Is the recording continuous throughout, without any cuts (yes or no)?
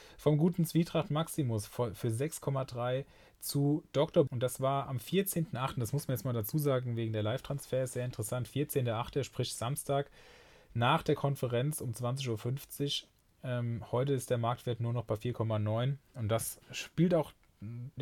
no